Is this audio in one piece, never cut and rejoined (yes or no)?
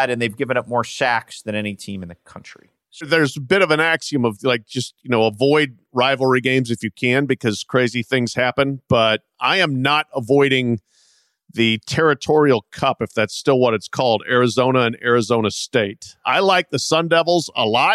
yes